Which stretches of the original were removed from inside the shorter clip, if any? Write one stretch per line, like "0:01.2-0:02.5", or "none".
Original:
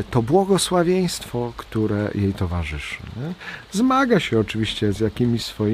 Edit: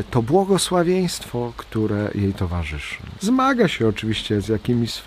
0:03.1-0:03.7